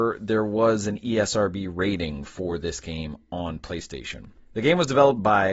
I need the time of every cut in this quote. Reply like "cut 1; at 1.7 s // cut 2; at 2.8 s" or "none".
cut 1; at 4.3 s